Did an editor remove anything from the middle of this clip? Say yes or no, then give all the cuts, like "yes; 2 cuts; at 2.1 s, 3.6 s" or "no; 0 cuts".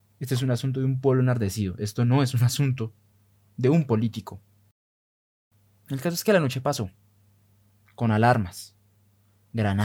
no; 0 cuts